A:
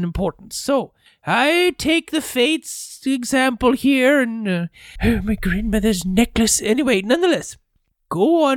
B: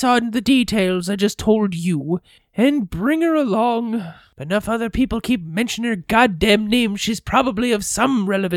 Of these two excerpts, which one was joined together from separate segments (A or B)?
A